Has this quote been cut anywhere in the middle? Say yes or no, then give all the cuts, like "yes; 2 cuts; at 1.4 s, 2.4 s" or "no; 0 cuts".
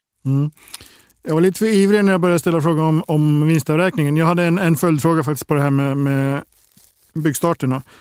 no; 0 cuts